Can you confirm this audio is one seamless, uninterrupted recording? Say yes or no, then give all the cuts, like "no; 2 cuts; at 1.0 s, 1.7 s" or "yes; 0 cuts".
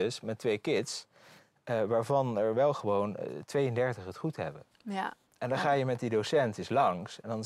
yes; 0 cuts